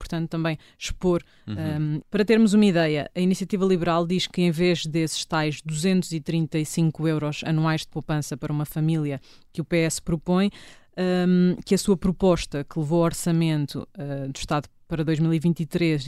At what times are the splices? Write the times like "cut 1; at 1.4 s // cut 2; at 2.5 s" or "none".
cut 1; at 2.0 s